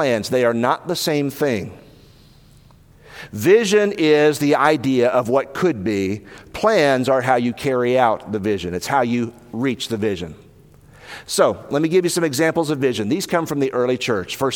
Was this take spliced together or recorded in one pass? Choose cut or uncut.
uncut